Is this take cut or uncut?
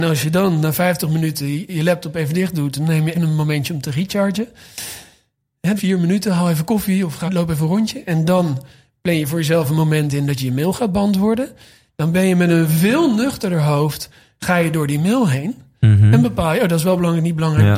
cut